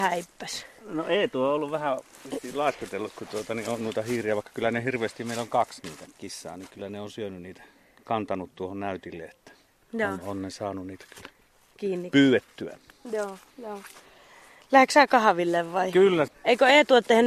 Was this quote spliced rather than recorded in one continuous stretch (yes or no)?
yes